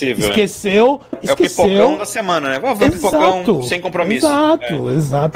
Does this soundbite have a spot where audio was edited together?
yes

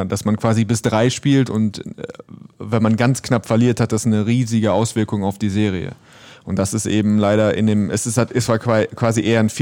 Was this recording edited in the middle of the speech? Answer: no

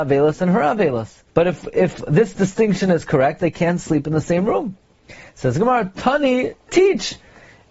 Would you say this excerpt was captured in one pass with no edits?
no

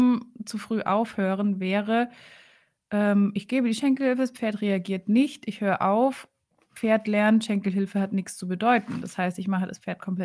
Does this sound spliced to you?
no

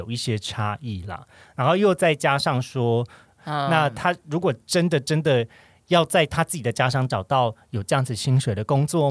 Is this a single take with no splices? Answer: no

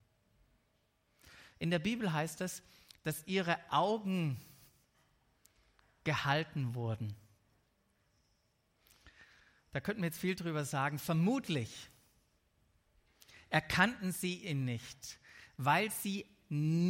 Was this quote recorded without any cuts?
yes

